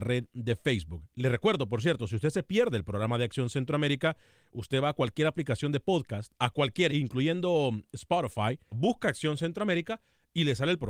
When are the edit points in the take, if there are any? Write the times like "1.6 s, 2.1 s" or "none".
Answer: 6.9 s, 8.7 s

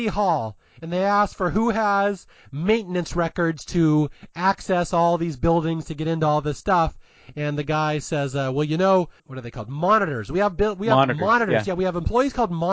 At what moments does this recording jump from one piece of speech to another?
9.2 s

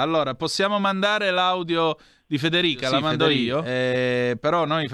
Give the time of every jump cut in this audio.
none

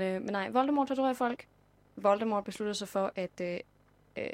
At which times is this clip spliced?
none

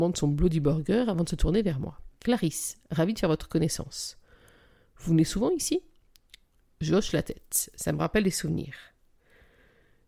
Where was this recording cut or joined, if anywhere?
2.2 s

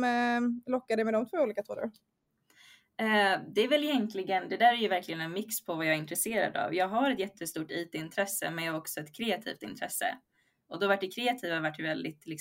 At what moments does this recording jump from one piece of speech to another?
none

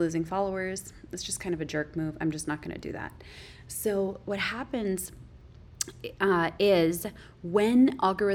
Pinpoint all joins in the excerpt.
none

